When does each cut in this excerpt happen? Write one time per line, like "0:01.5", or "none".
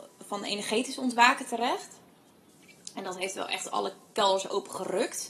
none